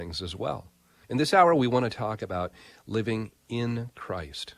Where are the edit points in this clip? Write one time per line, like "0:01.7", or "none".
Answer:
0:01.0